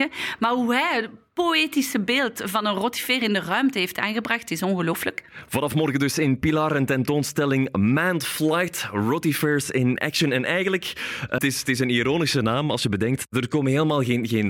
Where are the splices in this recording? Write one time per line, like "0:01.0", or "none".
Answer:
0:11.4